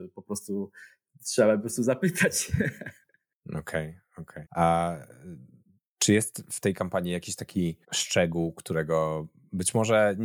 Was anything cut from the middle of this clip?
yes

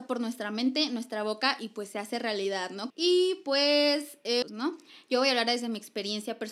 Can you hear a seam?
yes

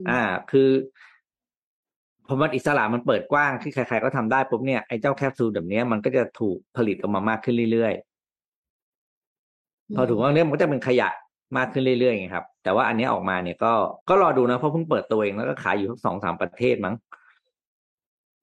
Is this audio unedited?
no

